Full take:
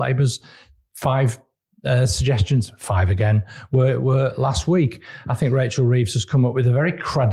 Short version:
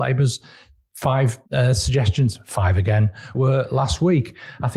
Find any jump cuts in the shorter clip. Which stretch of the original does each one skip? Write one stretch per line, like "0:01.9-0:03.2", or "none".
0:01.5-0:01.8
0:03.7-0:04.0